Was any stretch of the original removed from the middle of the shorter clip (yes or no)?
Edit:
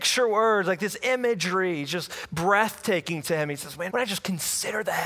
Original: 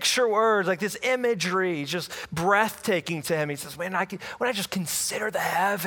yes